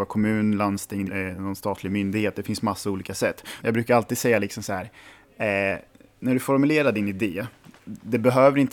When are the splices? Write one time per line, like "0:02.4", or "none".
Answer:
0:01.1
0:03.6

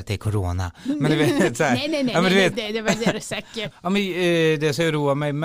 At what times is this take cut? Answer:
0:02.5
0:03.7

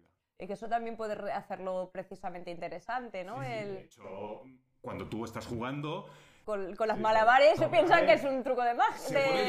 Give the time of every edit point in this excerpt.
0:06.4
0:07.6

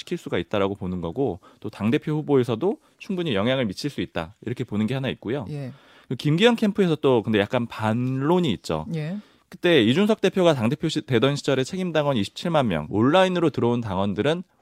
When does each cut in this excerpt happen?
0:12.9

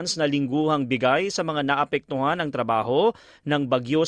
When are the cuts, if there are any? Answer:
none

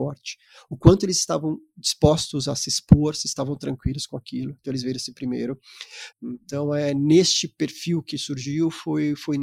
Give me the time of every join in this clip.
0:06.1

